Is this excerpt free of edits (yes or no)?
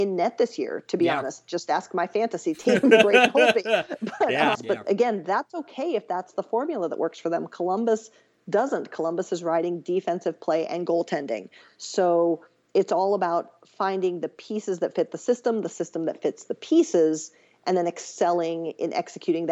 no